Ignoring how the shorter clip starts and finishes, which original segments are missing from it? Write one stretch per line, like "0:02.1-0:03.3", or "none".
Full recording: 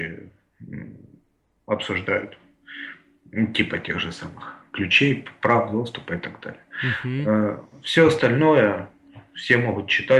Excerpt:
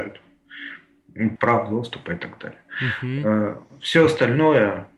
0:03.5-0:05.4